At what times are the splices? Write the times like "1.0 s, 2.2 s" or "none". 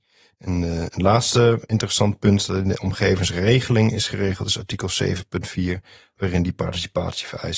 none